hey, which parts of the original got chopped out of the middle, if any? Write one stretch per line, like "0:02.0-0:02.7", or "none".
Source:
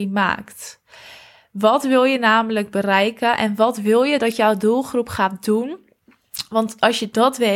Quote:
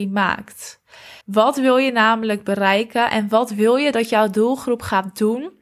0:01.2-0:01.5